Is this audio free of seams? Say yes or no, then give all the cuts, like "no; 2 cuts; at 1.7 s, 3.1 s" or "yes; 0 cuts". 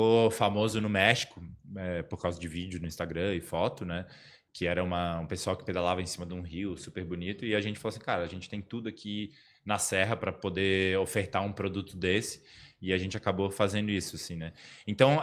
yes; 0 cuts